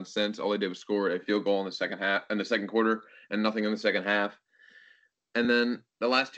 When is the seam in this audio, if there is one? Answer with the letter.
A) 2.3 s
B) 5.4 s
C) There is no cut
C